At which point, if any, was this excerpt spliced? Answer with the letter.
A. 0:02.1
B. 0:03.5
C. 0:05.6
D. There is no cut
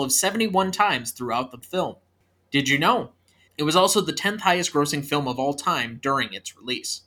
B